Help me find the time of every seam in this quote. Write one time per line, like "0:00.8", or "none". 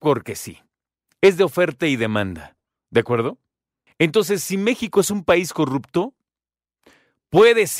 0:03.9